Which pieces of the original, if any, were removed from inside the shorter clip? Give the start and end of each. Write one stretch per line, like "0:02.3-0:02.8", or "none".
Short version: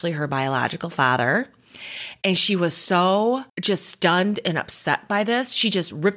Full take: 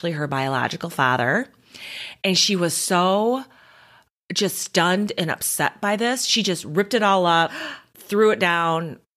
0:03.5-0:04.2